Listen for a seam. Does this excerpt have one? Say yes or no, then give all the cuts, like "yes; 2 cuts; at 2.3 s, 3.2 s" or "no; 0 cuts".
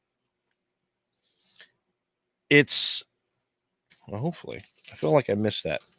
yes; 1 cut; at 3.9 s